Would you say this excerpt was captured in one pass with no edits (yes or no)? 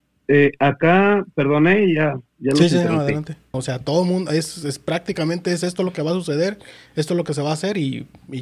no